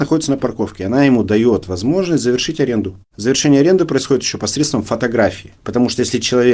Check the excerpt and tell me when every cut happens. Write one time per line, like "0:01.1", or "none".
0:05.6

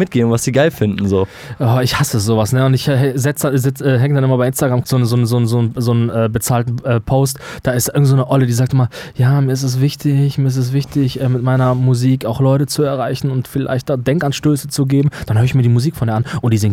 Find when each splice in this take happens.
0:04.8

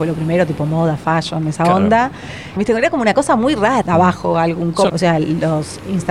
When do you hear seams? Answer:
0:02.6
0:03.8
0:04.9

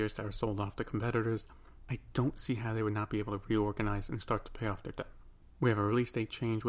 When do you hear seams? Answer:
0:01.8

